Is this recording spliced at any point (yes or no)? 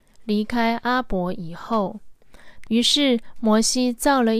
yes